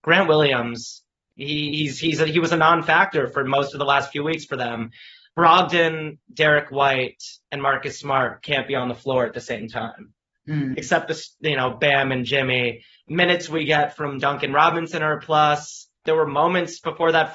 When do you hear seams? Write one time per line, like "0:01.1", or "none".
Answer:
0:10.7
0:16.0

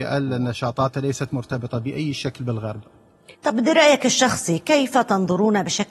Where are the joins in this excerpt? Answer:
0:03.3

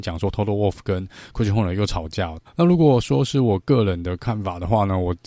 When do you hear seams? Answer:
0:02.4

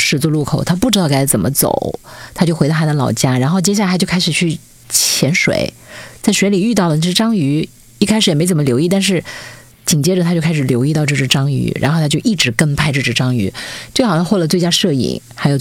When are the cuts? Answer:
none

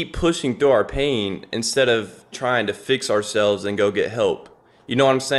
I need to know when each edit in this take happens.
0:02.3

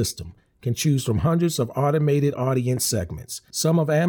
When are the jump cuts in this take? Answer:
none

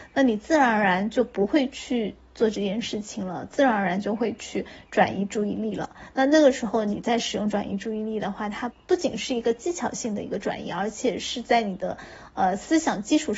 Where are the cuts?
0:08.7

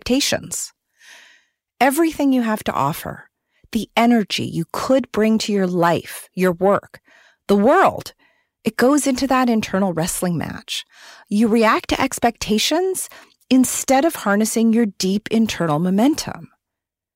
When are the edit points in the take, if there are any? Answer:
none

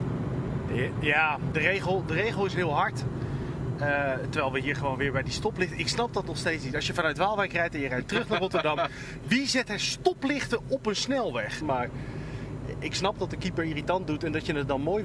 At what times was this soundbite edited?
0:01.5
0:11.6

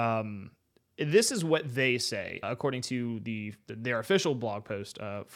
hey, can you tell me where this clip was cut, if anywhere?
0:02.4

